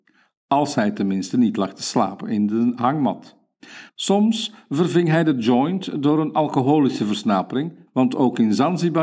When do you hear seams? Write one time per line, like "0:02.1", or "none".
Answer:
0:03.9
0:07.9